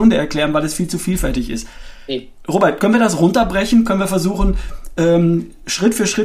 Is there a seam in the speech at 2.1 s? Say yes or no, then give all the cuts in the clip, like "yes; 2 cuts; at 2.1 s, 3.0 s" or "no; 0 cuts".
no; 0 cuts